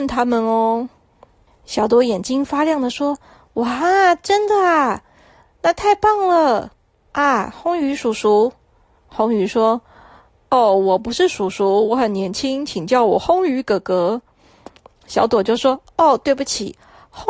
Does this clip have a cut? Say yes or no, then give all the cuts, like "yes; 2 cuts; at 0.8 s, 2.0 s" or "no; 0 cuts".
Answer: no; 0 cuts